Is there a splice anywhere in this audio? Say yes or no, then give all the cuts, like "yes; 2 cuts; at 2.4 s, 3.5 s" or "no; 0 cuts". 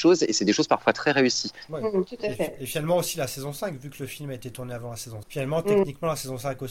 yes; 2 cuts; at 1.7 s, 5.2 s